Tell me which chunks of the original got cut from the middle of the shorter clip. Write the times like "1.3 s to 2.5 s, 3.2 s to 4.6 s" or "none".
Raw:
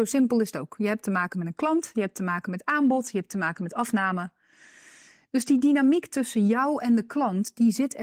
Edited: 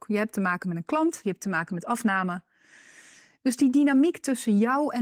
1.9 s to 3.1 s

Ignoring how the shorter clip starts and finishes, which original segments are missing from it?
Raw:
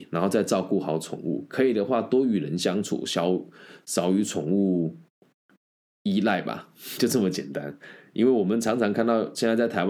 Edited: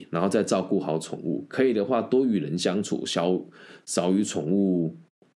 none

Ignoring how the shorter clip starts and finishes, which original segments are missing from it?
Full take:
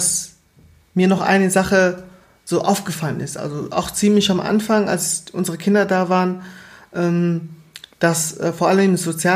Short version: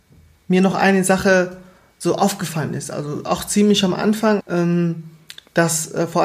4.9 s to 6.8 s

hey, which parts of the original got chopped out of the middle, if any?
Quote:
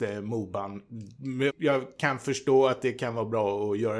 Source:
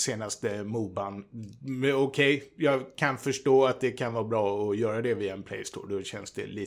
1.9 s to 2.5 s

